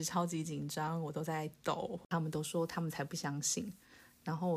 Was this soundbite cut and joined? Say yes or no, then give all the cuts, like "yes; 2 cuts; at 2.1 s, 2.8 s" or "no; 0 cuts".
no; 0 cuts